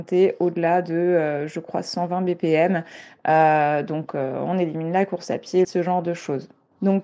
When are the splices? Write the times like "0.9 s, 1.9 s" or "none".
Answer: 5.6 s